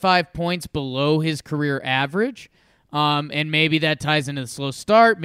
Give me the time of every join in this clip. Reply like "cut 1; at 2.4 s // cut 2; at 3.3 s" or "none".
none

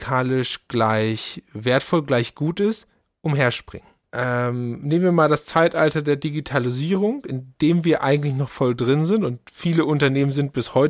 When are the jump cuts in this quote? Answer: cut 1; at 4.0 s

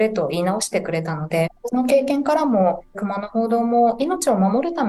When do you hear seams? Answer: cut 1; at 1.5 s // cut 2; at 2.9 s

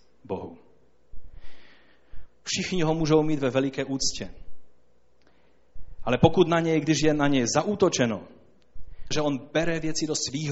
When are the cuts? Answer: cut 1; at 2.3 s // cut 2; at 9.1 s

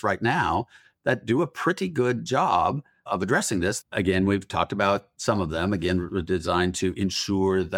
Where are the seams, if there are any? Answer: cut 1; at 3.8 s

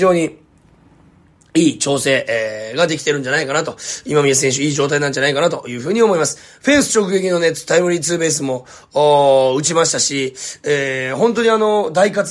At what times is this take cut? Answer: none

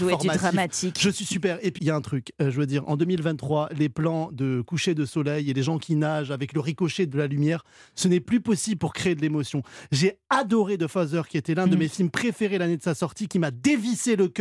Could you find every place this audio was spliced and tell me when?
cut 1; at 1.8 s

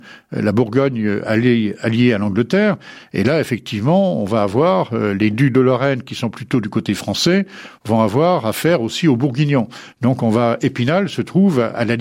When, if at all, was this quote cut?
none

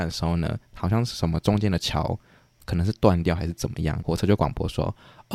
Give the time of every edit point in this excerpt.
cut 1; at 4.0 s

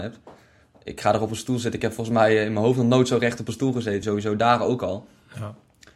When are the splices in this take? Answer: cut 1; at 4.0 s

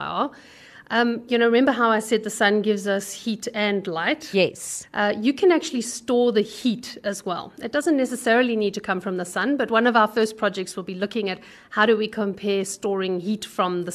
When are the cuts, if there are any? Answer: none

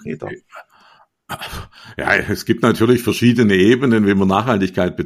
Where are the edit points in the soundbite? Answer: none

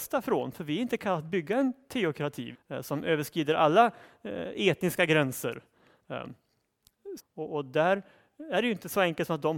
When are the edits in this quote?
cut 1; at 2.5 s // cut 2; at 7.2 s

